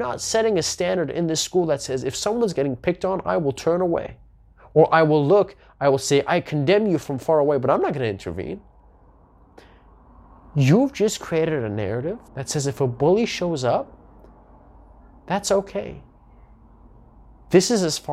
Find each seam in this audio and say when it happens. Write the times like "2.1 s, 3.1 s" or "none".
12.3 s